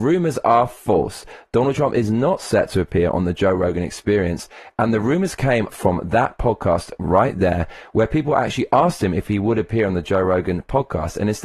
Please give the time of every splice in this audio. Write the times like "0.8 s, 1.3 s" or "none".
5.7 s